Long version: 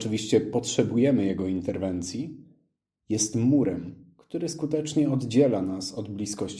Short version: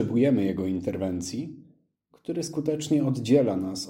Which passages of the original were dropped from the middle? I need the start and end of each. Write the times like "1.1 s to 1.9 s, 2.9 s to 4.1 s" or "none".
2.9 s to 4.2 s

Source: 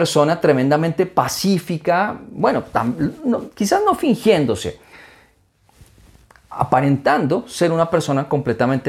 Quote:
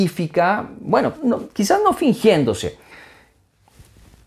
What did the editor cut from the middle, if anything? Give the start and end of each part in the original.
2.7 s to 3.2 s

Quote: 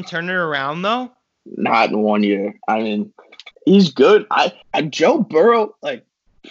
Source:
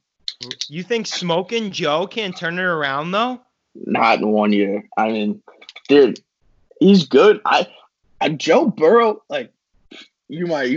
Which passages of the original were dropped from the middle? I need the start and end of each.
5.8 s to 6.7 s, 7.8 s to 8.1 s

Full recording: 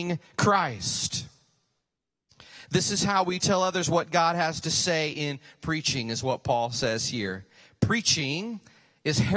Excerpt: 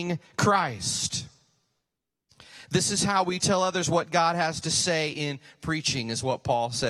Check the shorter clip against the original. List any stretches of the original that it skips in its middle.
none

